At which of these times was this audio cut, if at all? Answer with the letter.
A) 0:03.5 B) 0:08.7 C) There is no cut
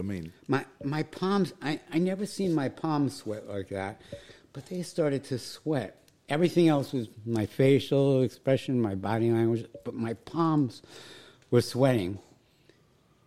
C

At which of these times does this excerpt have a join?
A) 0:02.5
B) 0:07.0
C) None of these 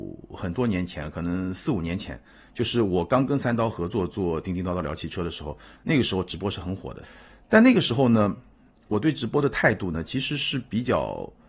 B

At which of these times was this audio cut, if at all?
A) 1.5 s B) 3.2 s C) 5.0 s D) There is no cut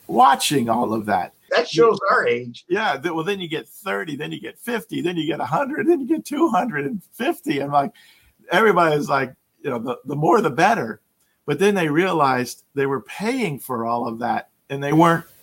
A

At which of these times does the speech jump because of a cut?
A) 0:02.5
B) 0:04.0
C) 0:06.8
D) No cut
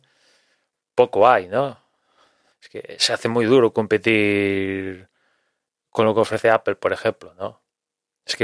A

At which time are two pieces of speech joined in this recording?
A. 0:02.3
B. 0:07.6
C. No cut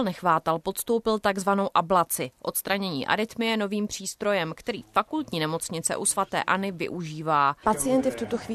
B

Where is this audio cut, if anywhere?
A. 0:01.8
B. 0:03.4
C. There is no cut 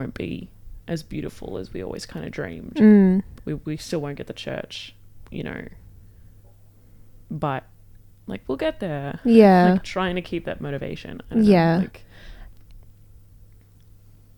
B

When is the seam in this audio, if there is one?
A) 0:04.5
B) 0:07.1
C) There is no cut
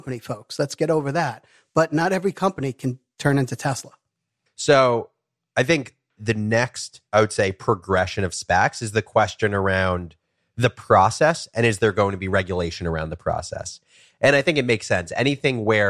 A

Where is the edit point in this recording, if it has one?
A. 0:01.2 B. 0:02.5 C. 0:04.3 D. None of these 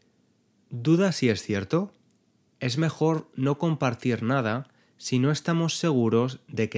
B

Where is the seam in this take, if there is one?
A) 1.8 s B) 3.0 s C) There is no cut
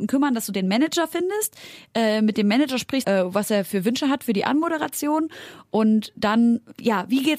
B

